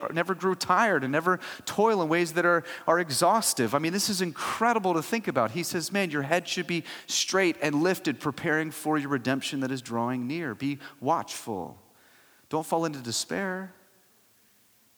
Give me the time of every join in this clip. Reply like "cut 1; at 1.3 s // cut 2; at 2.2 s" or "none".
none

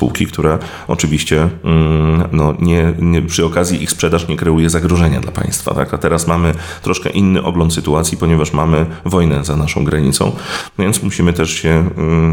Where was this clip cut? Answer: none

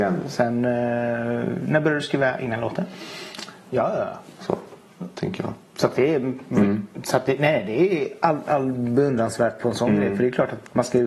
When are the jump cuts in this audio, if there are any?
cut 1; at 3.7 s

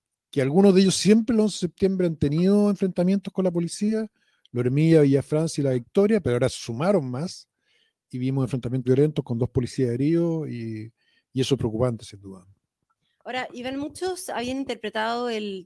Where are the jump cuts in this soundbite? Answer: cut 1; at 8.8 s

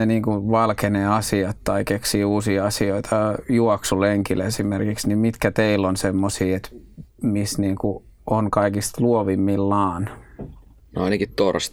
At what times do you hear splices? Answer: none

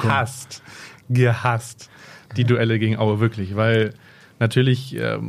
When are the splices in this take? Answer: none

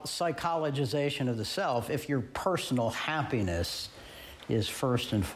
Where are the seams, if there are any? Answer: none

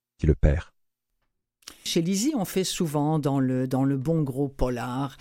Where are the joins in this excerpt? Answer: cut 1; at 1.9 s

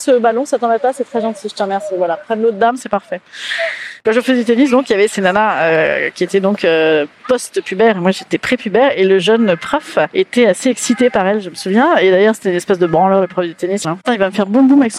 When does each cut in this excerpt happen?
cut 1; at 13.8 s

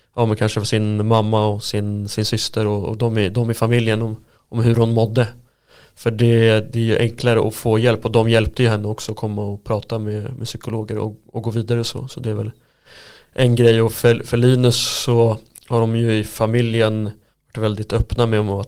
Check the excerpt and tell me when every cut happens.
none

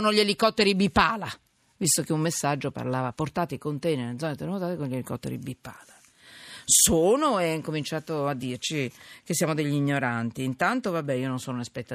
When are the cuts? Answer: none

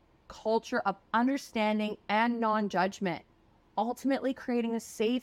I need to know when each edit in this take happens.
cut 1; at 2.0 s

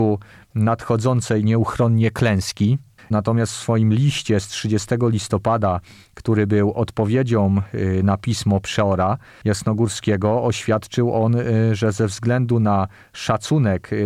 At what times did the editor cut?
cut 1; at 3.0 s

